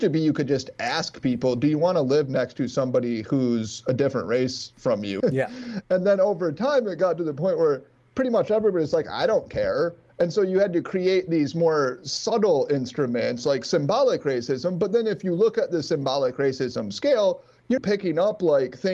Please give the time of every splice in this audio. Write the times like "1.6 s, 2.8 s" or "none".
5.2 s, 17.8 s